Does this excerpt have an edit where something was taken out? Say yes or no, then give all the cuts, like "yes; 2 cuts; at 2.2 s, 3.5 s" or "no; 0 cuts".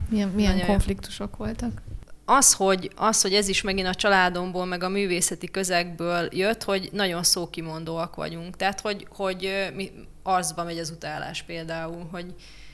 no; 0 cuts